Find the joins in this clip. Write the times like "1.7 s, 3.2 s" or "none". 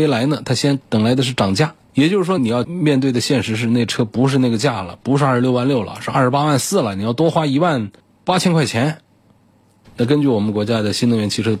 2.4 s, 9.8 s